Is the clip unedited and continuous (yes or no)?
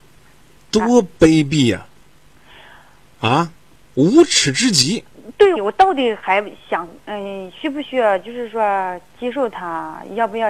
no